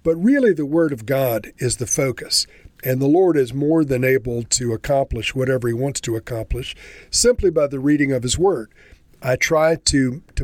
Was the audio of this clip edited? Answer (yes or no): yes